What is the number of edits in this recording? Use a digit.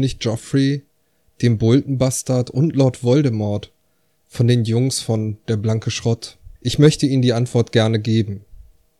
1